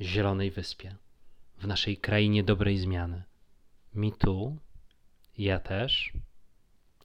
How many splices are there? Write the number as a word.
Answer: one